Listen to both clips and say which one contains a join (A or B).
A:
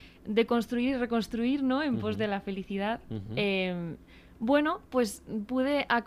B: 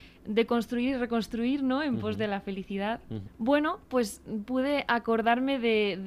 B